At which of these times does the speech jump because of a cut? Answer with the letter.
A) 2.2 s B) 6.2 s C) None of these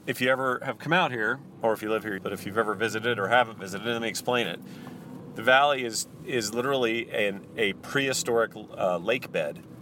A